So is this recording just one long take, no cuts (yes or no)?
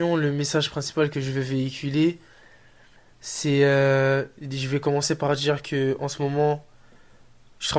yes